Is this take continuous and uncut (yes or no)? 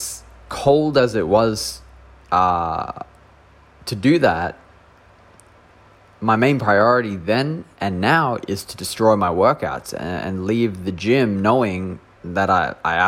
yes